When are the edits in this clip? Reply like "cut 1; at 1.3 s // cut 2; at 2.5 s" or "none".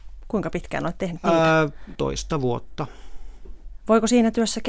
cut 1; at 1.9 s